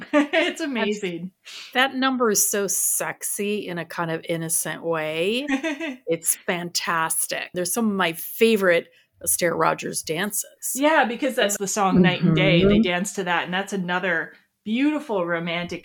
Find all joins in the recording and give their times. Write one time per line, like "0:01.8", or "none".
0:07.5
0:11.6